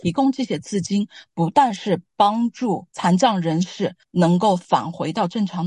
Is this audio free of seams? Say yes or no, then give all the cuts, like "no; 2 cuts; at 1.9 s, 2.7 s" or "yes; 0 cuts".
yes; 0 cuts